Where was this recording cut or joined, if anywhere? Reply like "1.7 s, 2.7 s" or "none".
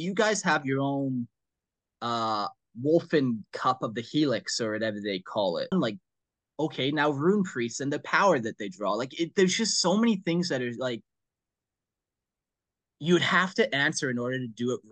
5.7 s